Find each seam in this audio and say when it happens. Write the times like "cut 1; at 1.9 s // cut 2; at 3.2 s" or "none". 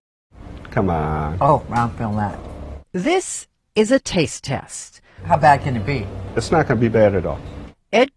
none